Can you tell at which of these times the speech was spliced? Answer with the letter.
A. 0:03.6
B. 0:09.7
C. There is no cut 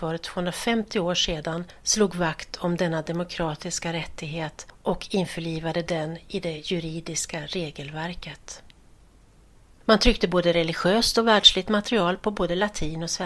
B